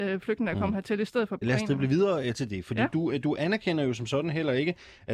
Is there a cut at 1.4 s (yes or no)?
yes